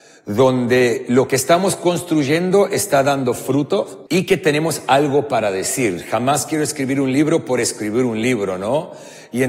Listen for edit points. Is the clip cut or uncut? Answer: cut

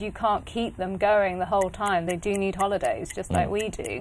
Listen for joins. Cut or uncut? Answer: uncut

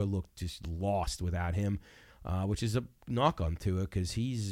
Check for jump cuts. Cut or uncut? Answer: uncut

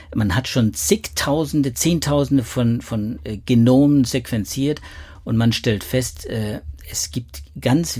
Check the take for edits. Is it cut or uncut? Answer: uncut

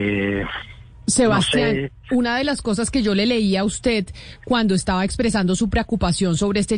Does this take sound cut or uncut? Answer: uncut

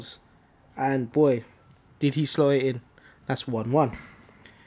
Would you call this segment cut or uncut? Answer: uncut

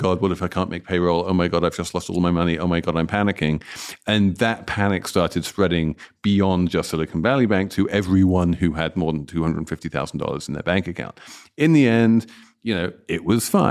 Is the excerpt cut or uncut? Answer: uncut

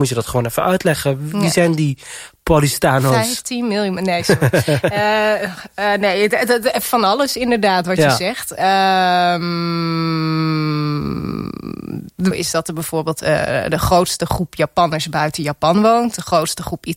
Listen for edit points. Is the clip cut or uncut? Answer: cut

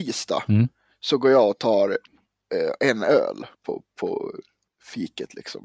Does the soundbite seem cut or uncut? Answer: cut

